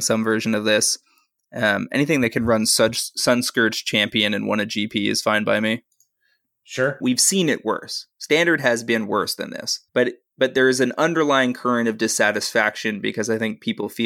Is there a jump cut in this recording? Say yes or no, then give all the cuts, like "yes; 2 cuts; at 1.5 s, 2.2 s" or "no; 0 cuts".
yes; 2 cuts; at 7.0 s, 9.9 s